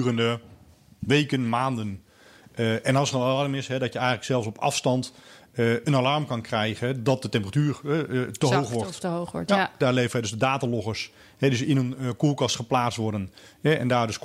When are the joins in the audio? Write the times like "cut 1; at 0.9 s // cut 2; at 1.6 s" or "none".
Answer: none